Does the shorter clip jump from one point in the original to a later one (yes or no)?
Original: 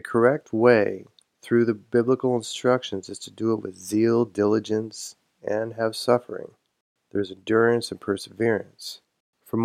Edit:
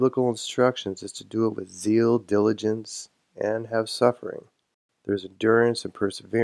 no